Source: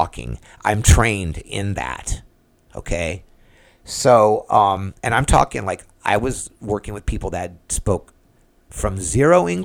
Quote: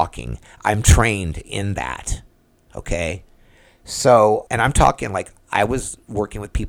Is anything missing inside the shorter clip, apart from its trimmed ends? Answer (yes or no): yes